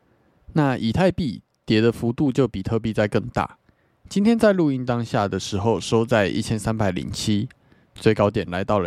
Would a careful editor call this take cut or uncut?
cut